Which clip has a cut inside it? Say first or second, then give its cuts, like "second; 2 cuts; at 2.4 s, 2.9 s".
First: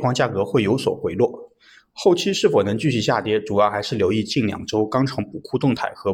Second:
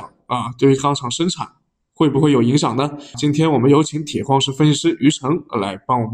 second; 1 cut; at 3.1 s